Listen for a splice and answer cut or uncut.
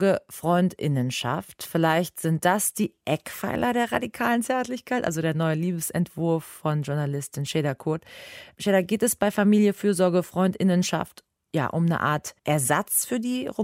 cut